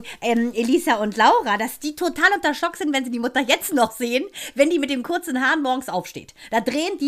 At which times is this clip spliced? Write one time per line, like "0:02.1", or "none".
none